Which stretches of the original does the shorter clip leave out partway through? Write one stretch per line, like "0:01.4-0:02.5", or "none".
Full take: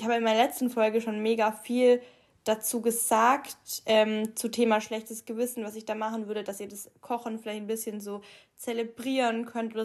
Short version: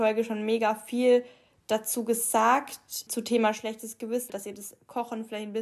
0:03.8-0:04.3
0:05.6-0:06.4